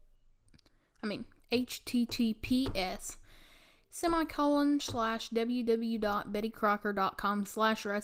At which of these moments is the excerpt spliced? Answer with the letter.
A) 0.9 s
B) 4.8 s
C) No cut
B